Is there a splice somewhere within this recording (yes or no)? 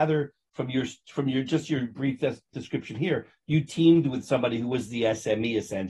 no